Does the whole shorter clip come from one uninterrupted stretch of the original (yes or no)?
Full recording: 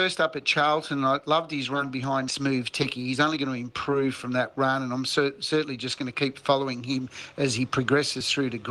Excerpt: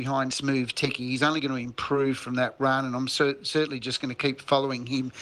yes